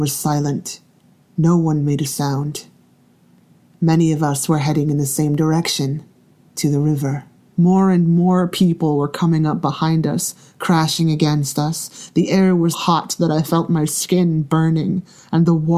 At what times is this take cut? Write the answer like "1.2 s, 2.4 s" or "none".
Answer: 7.5 s, 12.7 s